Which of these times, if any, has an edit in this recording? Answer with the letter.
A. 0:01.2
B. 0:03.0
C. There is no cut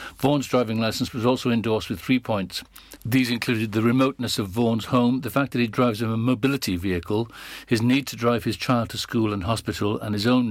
B